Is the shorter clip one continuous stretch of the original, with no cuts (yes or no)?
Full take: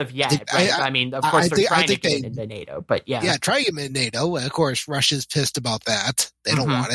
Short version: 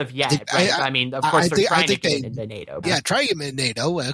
no